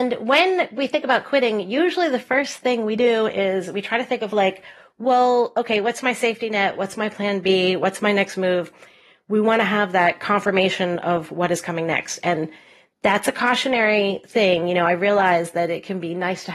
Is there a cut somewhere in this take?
no; 0 cuts

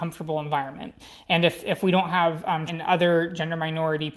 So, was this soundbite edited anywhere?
yes; 1 cut; at 2.7 s

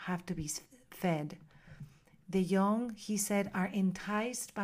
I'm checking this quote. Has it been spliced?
no; 0 cuts

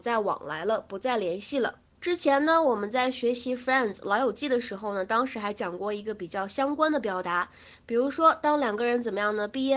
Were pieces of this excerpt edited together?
no; 0 cuts

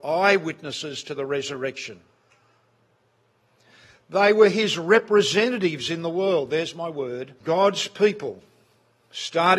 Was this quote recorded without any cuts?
no; 1 cut; at 7.4 s

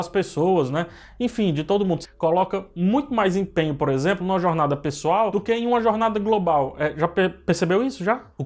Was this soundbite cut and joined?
yes; 1 cut; at 2.0 s

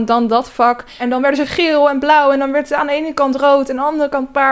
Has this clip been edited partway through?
yes; 1 cut; at 1.0 s

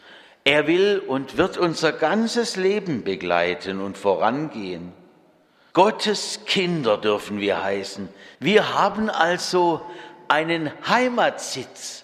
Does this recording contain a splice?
yes; 2 cuts; at 5.7 s, 8.3 s

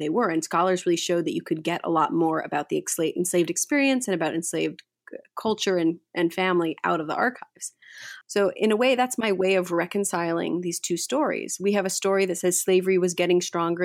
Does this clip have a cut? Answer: yes; 1 cut; at 8.2 s

